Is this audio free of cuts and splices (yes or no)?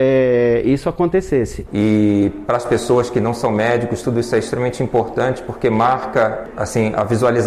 no